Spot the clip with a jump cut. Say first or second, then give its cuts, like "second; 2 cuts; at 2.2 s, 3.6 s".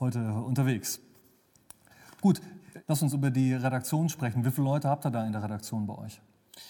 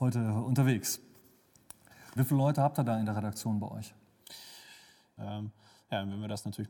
second; 2 cuts; at 2.2 s, 5.2 s